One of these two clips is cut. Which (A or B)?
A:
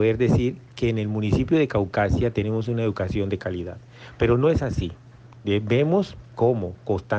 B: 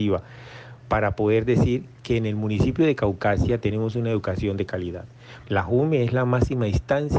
B